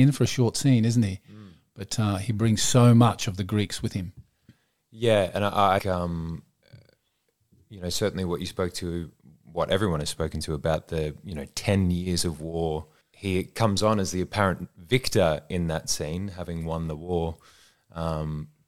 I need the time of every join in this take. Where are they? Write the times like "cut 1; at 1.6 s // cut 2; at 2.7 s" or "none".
cut 1; at 5.8 s // cut 2; at 13.0 s